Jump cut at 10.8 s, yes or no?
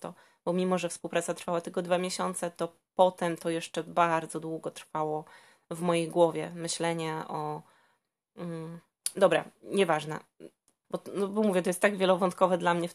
yes